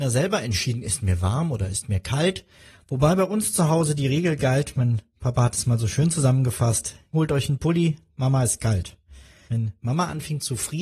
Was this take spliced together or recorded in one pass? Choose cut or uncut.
cut